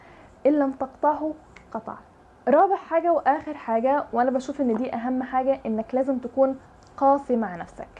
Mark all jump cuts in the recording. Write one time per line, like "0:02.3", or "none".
none

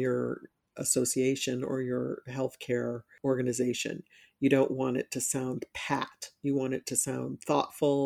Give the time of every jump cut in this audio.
none

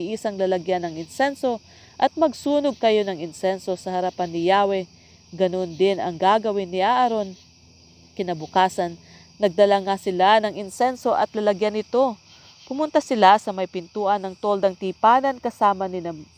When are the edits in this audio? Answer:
none

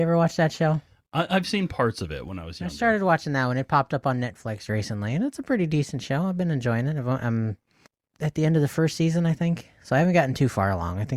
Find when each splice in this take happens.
none

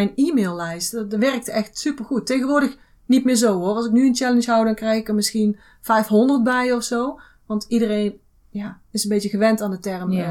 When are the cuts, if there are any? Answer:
none

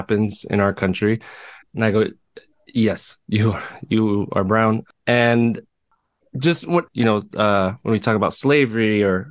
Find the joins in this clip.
0:01.6
0:06.9

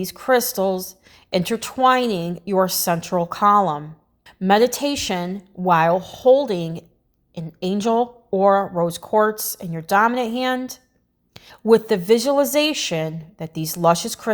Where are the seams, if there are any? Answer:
0:04.3
0:11.5

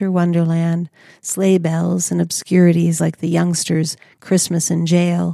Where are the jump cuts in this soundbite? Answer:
none

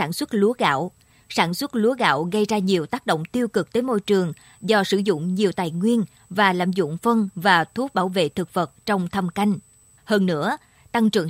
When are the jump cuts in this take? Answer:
0:10.0

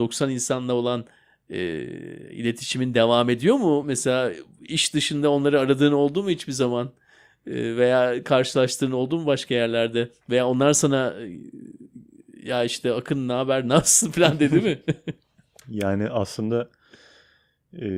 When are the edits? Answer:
none

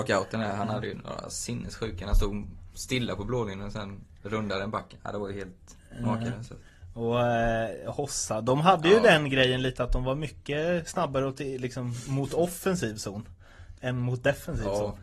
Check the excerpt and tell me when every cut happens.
none

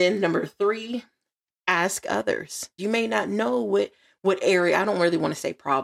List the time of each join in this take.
0:02.8

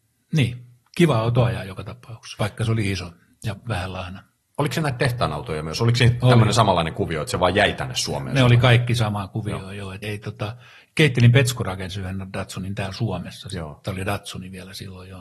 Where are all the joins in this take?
0:10.0

